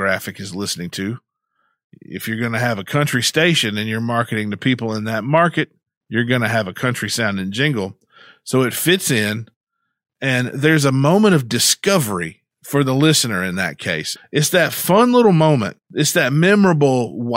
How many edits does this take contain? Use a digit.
2